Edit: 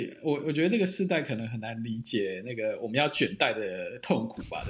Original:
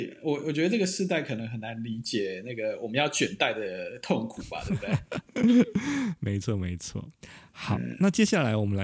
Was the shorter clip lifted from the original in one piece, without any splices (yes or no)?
yes